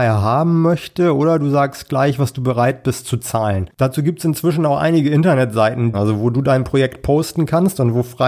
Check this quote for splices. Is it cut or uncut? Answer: cut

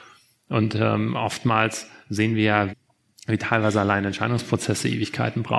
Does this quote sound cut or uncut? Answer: cut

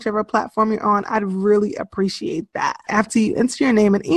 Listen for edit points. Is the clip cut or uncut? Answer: cut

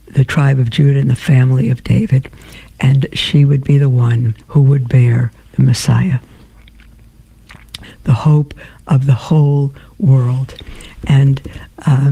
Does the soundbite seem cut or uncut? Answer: cut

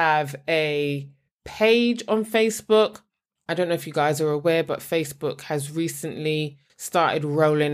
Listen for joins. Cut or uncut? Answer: uncut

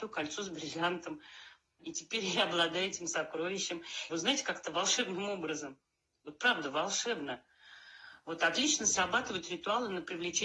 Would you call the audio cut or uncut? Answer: cut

